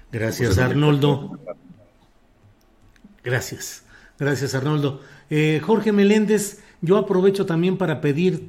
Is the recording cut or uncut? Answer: uncut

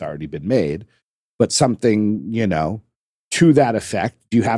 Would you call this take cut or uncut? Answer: uncut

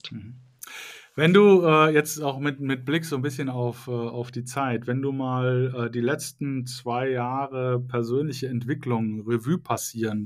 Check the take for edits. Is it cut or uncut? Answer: uncut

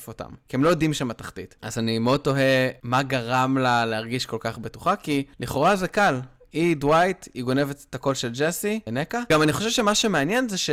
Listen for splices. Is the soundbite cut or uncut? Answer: cut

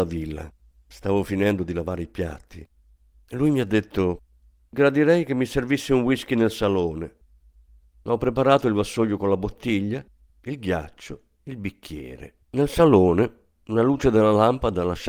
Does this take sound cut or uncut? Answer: cut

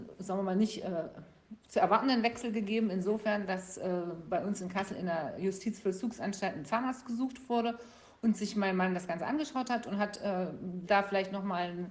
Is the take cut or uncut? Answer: cut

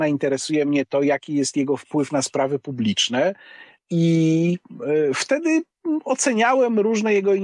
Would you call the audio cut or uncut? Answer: cut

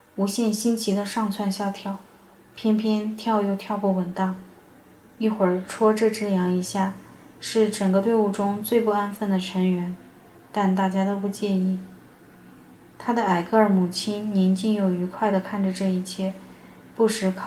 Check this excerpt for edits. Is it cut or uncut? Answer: cut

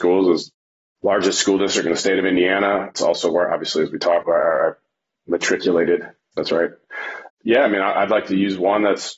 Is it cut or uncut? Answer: cut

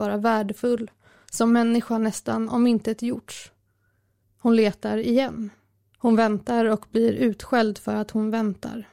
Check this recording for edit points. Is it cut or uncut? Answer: cut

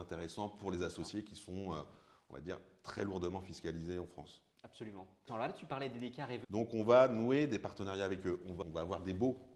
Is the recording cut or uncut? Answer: cut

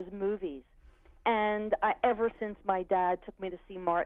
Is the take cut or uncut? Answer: uncut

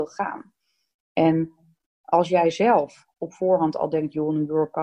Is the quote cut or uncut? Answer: uncut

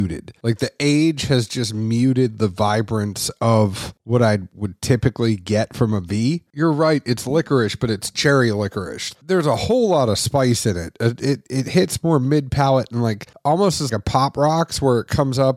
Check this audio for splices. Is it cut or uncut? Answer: cut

